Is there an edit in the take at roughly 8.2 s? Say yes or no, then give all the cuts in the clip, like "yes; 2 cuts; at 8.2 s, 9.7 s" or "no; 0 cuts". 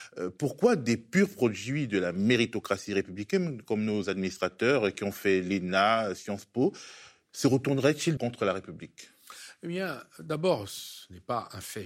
yes; 1 cut; at 8.2 s